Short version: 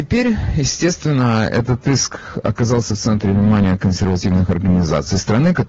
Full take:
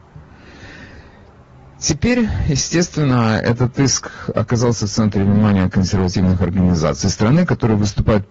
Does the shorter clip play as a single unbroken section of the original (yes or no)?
yes